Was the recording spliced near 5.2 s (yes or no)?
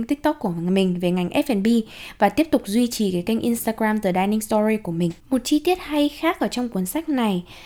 yes